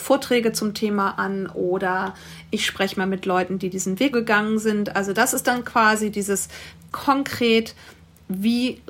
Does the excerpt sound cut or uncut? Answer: cut